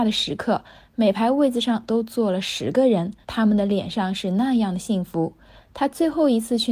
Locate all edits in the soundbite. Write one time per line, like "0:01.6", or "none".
0:03.2
0:05.6